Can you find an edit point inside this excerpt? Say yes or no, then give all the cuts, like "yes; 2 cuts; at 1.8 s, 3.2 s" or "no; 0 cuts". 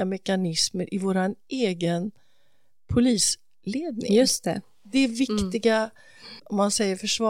yes; 1 cut; at 6.4 s